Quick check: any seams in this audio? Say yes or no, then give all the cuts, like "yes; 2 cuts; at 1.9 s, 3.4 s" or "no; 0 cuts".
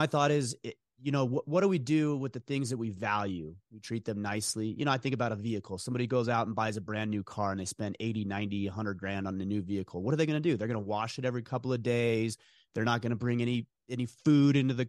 yes; 1 cut; at 3.6 s